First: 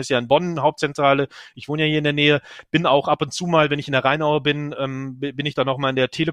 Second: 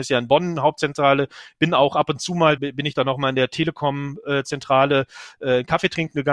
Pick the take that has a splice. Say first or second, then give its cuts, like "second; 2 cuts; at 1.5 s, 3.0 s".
second; 2 cuts; at 1.5 s, 2.6 s